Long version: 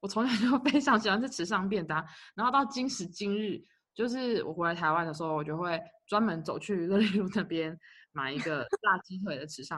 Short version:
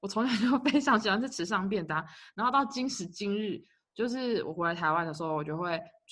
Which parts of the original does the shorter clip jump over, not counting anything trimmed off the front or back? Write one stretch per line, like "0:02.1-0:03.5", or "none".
none